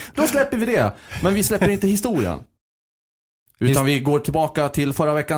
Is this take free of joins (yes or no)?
yes